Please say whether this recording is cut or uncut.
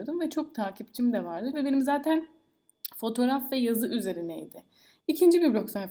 cut